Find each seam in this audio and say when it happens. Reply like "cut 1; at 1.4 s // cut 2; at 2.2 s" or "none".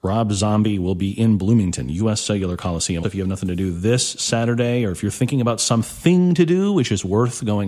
cut 1; at 3.0 s